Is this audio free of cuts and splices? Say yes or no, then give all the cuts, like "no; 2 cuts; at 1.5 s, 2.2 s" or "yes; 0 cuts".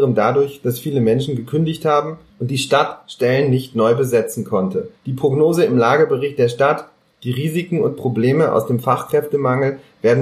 no; 1 cut; at 5.0 s